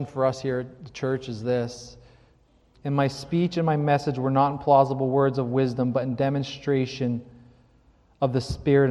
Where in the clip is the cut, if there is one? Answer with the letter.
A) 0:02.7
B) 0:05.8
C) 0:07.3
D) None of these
A